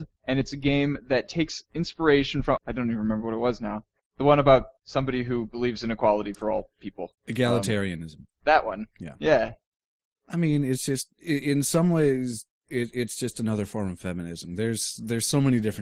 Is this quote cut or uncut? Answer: cut